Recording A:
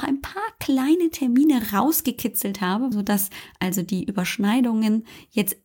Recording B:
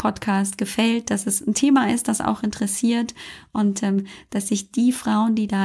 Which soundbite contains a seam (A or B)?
A